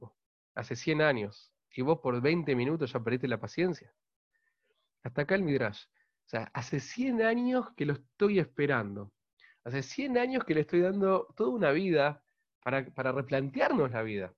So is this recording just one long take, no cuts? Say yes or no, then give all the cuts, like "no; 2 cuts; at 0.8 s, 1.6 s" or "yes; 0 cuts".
yes; 0 cuts